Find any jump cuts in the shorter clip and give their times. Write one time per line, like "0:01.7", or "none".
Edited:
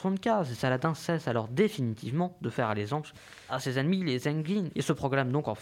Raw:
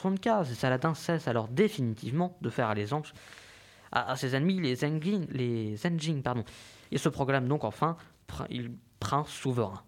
0:03.5
0:04.7